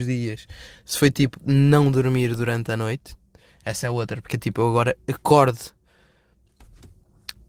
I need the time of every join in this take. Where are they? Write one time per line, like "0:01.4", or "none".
none

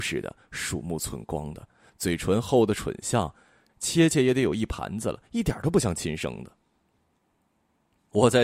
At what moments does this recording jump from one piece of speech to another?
none

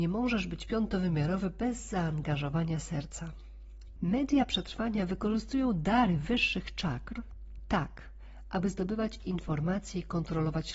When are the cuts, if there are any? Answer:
0:04.0

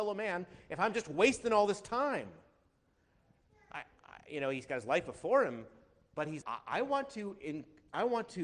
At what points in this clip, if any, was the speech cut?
0:06.4

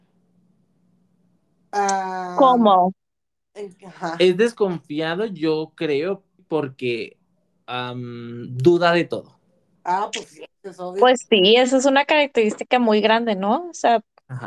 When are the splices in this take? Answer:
0:06.4
0:09.8

